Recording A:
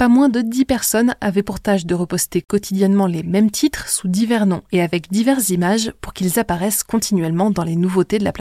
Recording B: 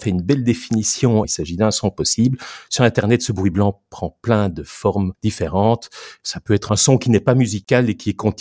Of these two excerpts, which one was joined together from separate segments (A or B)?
B